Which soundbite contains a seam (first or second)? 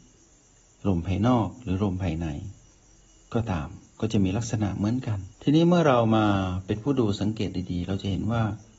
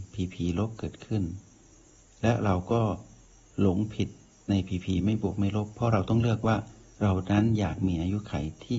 first